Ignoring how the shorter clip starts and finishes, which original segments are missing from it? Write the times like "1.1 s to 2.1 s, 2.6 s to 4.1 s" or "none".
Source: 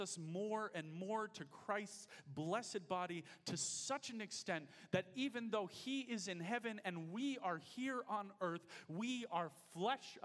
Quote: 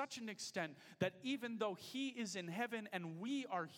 none